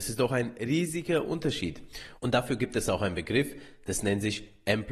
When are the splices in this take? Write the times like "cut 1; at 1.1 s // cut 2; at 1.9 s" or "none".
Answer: cut 1; at 2.2 s